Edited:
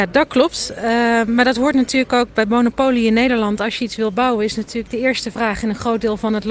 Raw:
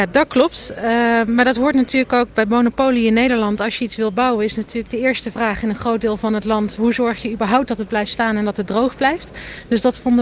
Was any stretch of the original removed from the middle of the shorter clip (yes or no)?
no